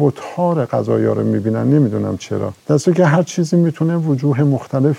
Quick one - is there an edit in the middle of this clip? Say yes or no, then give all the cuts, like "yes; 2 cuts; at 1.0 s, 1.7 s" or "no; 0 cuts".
yes; 1 cut; at 2.6 s